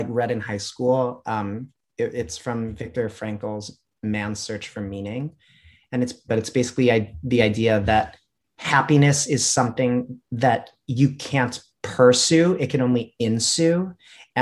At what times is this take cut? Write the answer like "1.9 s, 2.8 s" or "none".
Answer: 6.3 s